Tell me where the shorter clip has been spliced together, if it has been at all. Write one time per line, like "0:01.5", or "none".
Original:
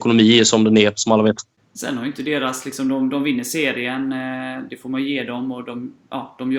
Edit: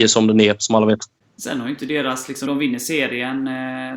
0:02.5

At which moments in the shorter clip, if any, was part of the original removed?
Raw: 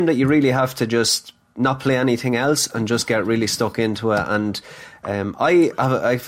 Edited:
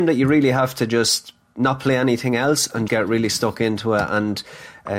0:02.9

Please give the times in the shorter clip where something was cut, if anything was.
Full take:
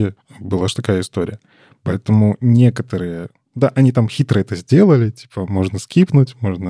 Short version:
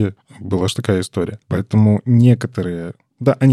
0:01.4

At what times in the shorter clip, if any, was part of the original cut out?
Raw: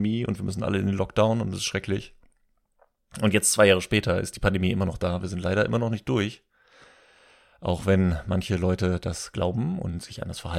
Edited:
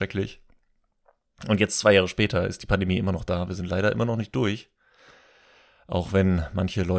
none

